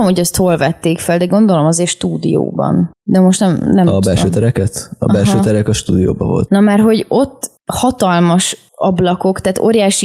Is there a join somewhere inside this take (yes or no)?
yes